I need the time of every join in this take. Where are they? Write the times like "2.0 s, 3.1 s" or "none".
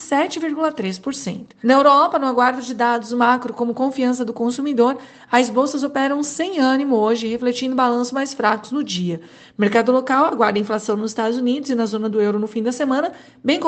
1.6 s